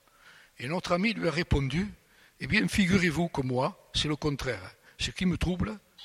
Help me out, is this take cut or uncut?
uncut